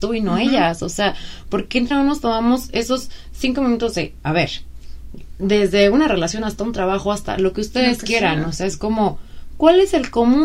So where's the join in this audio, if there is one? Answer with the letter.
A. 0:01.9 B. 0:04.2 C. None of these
A